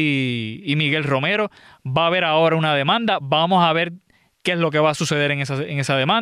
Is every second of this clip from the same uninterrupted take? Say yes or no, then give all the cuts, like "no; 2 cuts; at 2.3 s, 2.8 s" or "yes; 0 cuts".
yes; 0 cuts